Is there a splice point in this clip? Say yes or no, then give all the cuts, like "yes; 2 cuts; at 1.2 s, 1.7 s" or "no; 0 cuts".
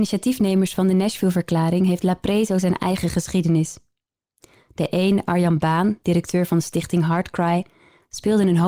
no; 0 cuts